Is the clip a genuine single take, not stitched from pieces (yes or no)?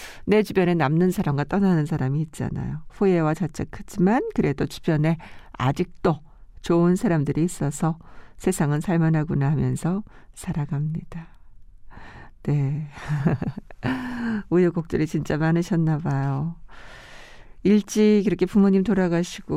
no